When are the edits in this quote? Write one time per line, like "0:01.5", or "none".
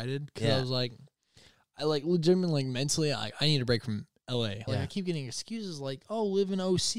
0:04.7